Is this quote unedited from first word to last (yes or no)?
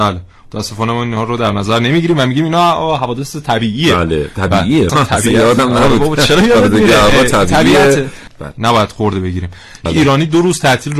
no